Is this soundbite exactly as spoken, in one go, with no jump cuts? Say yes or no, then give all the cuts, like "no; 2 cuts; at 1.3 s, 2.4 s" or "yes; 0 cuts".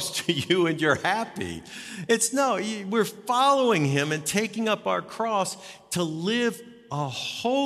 yes; 0 cuts